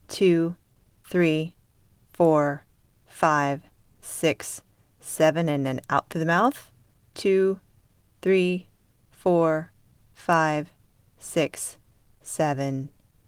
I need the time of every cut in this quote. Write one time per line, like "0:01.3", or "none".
none